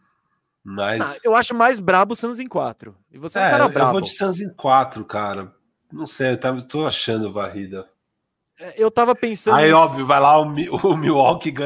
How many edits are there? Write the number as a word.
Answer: one